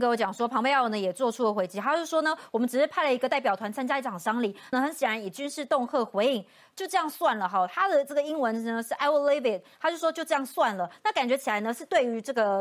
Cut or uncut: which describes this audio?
cut